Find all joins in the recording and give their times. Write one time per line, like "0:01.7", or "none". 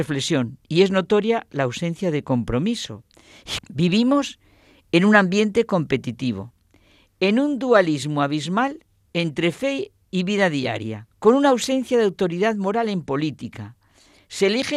0:03.6
0:11.1